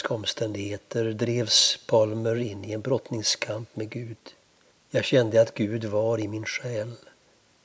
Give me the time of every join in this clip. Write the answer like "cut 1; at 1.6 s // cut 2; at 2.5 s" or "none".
cut 1; at 4.7 s